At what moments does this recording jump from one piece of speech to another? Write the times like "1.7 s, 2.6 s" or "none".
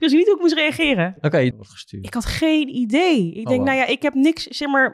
1.5 s